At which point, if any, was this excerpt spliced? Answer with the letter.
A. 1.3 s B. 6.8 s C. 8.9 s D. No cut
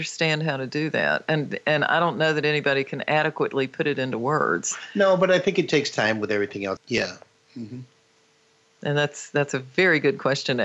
B